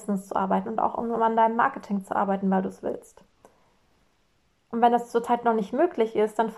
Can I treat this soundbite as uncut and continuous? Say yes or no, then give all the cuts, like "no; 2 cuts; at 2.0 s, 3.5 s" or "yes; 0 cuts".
yes; 0 cuts